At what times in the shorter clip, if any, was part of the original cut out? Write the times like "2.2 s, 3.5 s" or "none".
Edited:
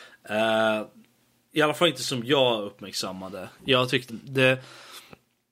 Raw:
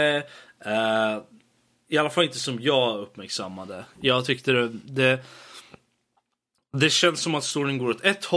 4.1 s